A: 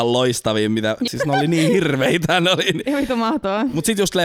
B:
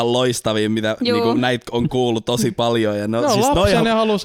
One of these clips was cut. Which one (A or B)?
A